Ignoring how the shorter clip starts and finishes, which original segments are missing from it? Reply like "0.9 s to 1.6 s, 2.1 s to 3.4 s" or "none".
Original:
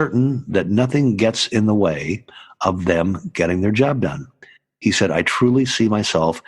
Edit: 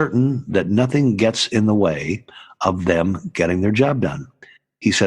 none